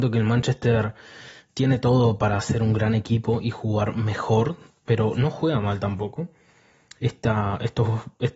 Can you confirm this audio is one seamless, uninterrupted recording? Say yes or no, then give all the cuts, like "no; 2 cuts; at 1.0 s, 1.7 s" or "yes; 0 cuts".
yes; 0 cuts